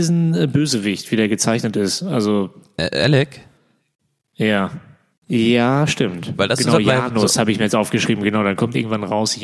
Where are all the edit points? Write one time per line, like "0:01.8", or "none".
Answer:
0:05.1